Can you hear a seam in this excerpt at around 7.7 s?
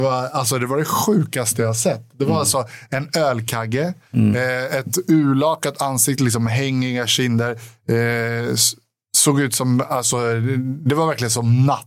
no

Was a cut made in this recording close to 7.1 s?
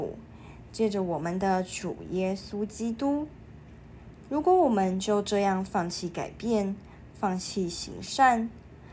no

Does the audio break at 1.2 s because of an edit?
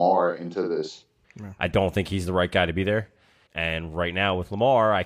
yes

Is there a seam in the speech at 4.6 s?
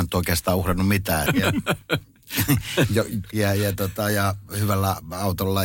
no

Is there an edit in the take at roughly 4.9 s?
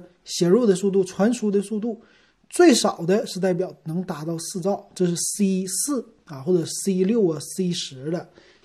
no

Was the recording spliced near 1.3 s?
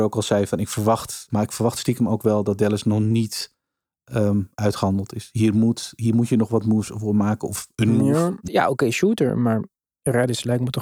yes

